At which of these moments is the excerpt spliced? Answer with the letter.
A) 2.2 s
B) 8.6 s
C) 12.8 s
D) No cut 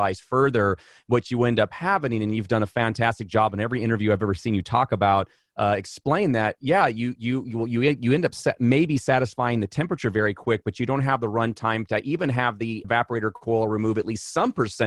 C